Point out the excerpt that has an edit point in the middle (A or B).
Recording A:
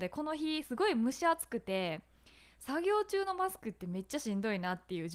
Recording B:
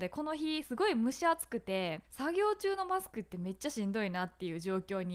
B